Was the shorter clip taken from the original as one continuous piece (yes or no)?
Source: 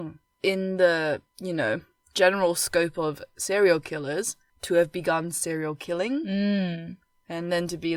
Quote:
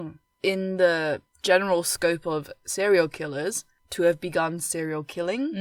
no